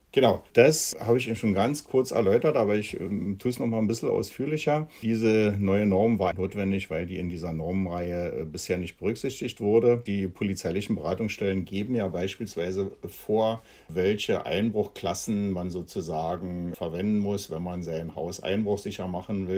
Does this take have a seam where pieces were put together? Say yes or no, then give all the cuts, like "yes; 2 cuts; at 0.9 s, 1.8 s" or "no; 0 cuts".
yes; 2 cuts; at 6.3 s, 10.1 s